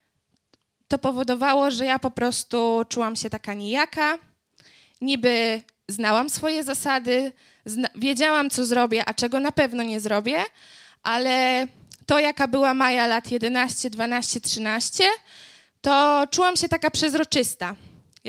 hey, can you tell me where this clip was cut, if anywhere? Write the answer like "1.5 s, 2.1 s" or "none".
none